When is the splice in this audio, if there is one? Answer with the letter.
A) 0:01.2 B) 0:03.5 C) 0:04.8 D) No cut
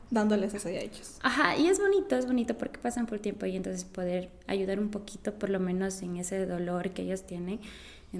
D